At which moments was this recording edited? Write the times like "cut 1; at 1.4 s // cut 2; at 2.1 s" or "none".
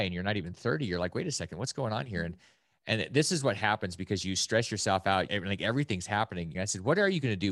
cut 1; at 5.3 s // cut 2; at 6.5 s